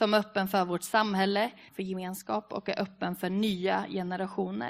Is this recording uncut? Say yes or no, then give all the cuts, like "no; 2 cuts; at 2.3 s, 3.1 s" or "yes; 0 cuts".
no; 1 cut; at 1.7 s